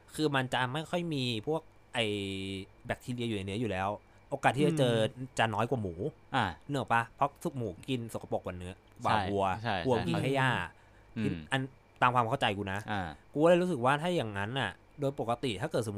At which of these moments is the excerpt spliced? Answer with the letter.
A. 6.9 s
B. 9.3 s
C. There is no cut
C